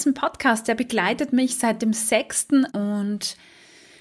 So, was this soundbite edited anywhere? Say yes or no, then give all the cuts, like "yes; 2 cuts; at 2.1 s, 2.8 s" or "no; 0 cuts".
yes; 1 cut; at 2.7 s